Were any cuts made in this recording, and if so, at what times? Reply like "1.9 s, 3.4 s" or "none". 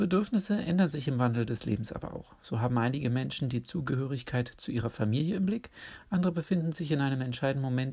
none